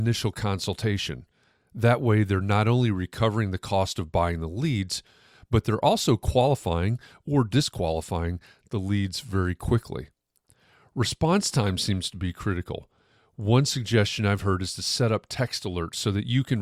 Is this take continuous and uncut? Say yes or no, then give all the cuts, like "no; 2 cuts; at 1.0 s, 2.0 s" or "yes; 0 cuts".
yes; 0 cuts